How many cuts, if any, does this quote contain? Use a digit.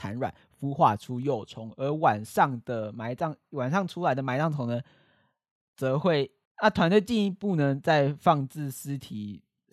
1